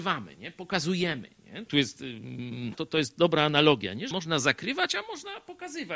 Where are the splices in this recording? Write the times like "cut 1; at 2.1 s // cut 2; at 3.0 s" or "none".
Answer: cut 1; at 1.7 s // cut 2; at 2.7 s // cut 3; at 4.1 s